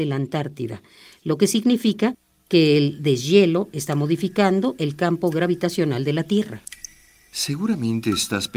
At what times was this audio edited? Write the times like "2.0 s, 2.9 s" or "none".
none